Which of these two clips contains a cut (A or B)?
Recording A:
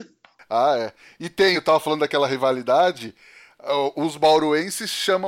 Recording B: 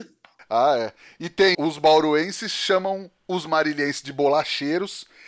B